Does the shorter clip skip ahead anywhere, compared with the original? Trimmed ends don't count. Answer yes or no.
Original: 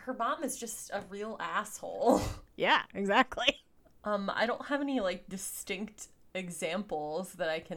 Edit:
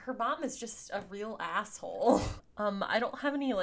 yes